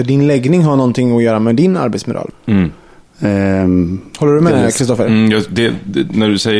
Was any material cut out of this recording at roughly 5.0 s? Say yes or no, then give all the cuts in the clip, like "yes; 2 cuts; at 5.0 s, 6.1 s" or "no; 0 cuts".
no; 1 cut; at 2.3 s